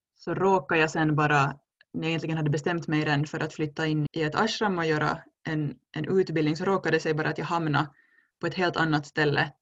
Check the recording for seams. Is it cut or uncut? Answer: cut